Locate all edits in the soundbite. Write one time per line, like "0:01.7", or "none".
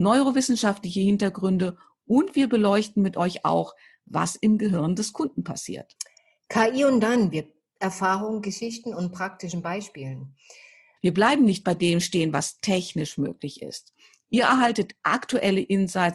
0:07.7
0:11.0

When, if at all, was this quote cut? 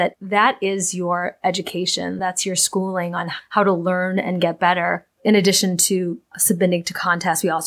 none

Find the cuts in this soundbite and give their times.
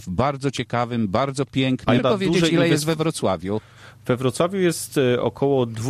0:02.0

